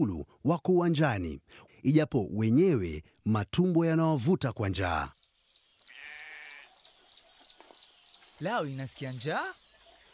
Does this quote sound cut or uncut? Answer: cut